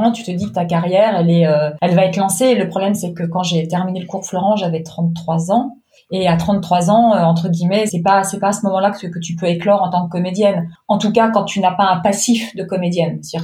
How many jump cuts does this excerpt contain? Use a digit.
1